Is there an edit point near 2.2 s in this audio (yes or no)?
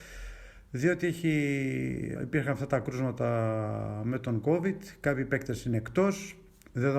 yes